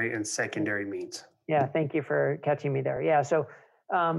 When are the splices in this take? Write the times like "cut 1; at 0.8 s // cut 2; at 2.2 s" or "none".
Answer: none